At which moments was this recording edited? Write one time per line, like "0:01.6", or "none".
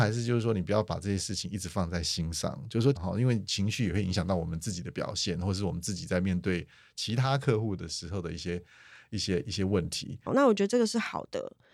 0:03.0
0:10.3